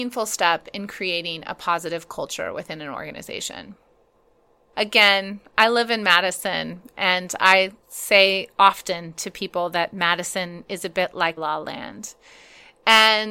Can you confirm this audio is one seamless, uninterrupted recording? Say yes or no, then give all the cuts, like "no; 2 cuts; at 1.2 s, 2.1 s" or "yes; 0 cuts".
no; 2 cuts; at 4.7 s, 11.4 s